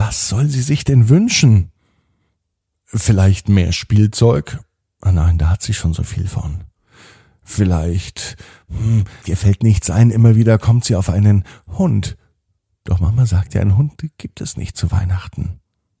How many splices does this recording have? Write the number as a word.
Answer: one